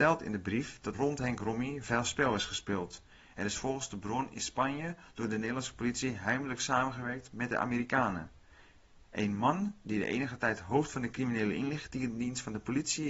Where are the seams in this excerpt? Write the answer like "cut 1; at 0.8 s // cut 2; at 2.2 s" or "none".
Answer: cut 1; at 0.9 s